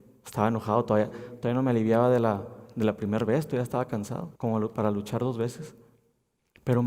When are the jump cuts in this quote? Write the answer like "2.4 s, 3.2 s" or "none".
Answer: 1.1 s, 4.4 s